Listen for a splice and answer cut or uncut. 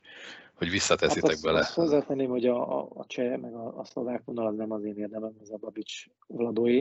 uncut